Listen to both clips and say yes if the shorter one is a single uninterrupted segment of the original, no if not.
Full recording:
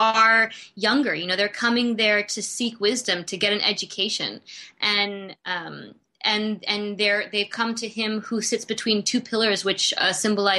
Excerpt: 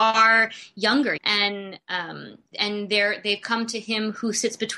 no